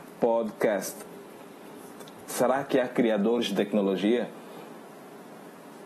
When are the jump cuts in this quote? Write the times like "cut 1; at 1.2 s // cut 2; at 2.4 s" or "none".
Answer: cut 1; at 2.3 s

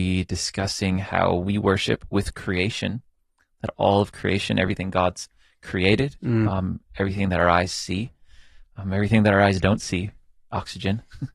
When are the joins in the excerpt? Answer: none

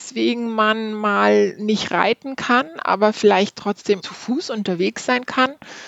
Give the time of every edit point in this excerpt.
cut 1; at 4.0 s

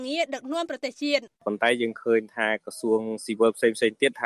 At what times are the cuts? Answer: cut 1; at 1.3 s

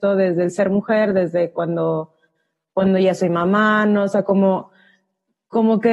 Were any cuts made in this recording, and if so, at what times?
none

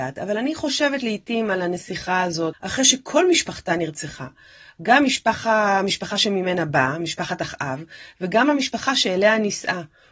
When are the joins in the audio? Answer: cut 1; at 2.5 s

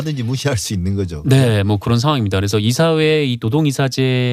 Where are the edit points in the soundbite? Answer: none

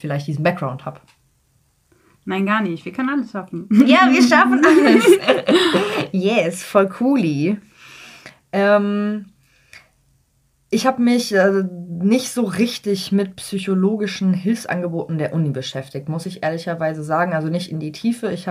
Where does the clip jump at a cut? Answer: none

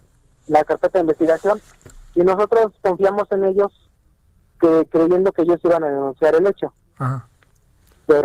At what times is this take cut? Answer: none

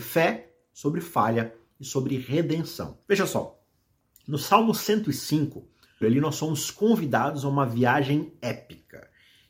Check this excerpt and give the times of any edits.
cut 1; at 3.0 s // cut 2; at 6.0 s

